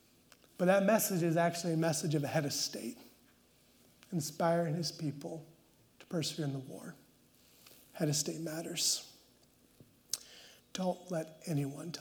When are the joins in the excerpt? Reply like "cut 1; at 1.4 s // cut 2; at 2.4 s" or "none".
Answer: cut 1; at 10.6 s